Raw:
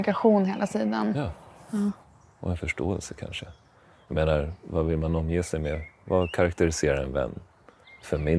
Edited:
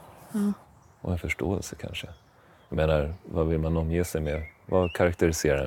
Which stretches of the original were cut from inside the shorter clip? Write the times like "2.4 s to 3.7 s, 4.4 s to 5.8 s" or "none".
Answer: none